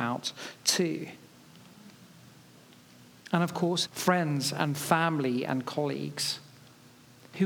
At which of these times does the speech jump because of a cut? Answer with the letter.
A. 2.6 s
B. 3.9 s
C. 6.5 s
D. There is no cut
B